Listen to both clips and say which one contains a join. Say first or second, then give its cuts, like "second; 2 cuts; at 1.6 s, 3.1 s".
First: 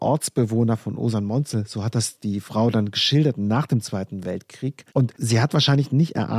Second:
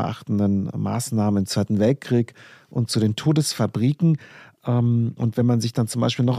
first; 1 cut; at 4.9 s